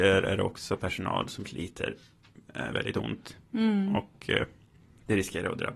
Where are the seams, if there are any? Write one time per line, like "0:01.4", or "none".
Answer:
0:02.7